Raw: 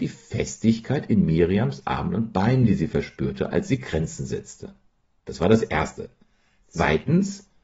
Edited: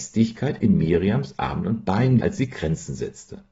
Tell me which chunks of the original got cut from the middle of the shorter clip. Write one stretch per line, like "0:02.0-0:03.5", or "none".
0:02.7-0:03.5